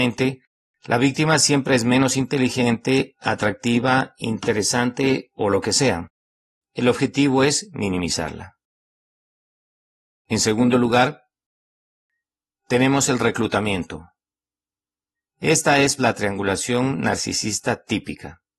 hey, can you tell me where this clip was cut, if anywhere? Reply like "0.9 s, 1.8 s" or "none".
16.0 s